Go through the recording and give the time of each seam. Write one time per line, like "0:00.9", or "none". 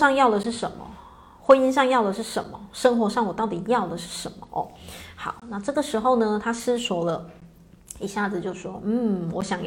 none